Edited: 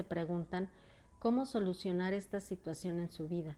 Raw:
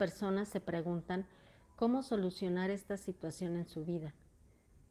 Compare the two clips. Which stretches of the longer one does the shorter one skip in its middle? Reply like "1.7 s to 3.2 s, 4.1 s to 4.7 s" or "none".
none